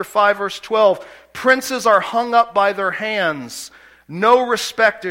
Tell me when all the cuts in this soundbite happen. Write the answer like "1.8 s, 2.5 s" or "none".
none